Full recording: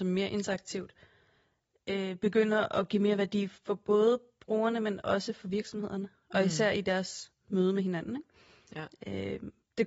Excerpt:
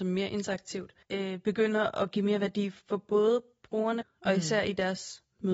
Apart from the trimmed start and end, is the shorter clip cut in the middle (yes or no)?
yes